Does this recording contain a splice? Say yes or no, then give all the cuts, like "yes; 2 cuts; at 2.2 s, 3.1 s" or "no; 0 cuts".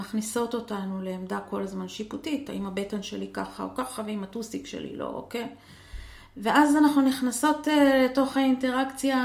no; 0 cuts